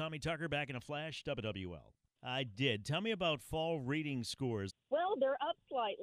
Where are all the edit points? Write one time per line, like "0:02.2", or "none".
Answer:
0:02.1
0:04.7